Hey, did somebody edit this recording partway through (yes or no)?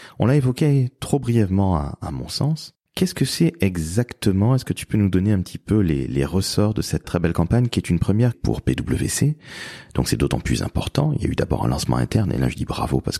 yes